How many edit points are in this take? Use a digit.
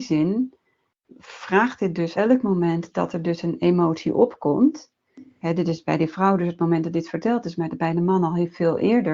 1